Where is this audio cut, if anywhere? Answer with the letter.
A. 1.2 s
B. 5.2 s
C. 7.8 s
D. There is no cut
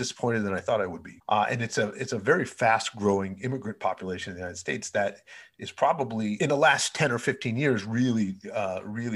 A